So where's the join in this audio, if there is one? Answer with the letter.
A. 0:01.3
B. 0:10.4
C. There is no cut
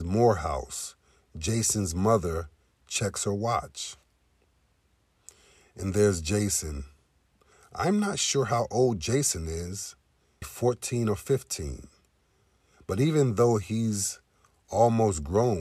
B